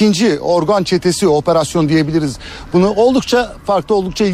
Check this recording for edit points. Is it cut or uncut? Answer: uncut